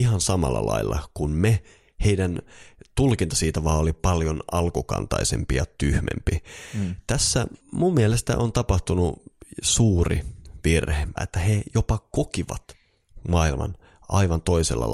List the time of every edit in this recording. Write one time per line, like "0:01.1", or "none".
0:07.6
0:11.2